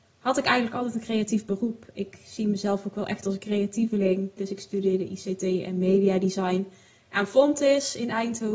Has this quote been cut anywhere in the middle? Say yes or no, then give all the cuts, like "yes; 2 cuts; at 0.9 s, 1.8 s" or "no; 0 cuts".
yes; 1 cut; at 4.4 s